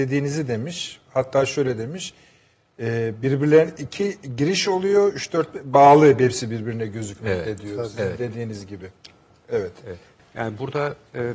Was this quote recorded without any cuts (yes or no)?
no